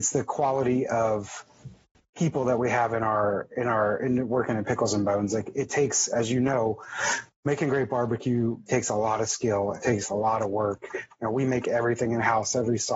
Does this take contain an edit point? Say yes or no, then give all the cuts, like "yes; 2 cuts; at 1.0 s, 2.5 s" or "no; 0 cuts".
no; 0 cuts